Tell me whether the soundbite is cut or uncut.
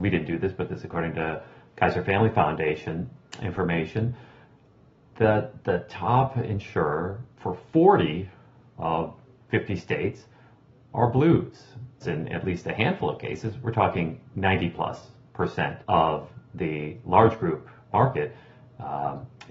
cut